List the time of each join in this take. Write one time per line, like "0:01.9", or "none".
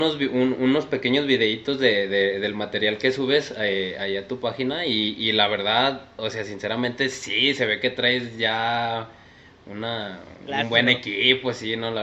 none